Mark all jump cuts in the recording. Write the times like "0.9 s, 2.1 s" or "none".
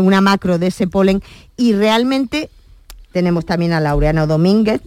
3.1 s